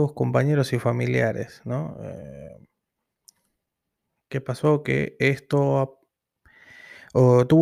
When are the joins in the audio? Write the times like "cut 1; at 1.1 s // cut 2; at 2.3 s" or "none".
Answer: none